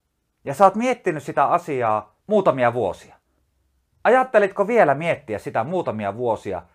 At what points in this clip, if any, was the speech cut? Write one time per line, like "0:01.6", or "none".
0:02.2